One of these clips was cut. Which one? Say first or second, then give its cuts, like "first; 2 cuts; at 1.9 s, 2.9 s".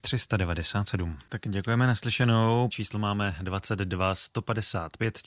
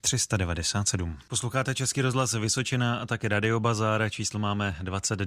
first; 2 cuts; at 1.3 s, 2.7 s